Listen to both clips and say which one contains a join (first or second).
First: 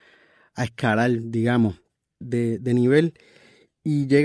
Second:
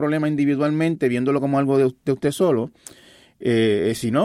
first